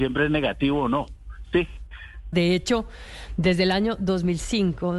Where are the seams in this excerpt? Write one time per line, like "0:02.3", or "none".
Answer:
0:02.3